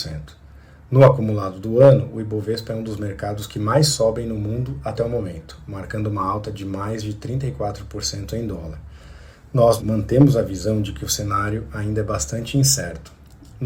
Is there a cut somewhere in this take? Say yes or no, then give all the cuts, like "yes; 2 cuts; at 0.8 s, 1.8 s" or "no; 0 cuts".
yes; 1 cut; at 9.8 s